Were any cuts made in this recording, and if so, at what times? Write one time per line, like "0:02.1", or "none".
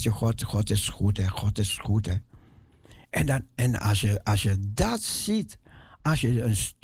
0:03.0